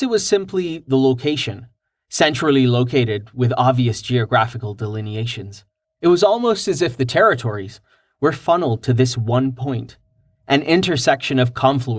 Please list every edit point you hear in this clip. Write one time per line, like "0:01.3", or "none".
0:05.8